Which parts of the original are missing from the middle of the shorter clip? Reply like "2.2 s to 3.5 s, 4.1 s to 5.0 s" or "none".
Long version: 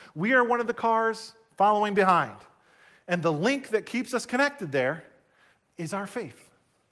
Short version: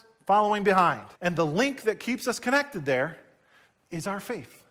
2.5 s to 3.0 s